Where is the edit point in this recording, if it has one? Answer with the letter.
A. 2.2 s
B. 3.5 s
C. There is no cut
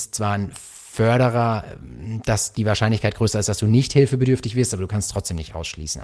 C